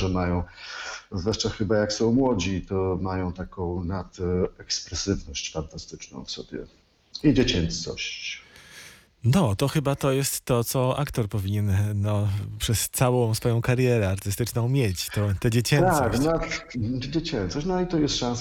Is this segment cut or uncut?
uncut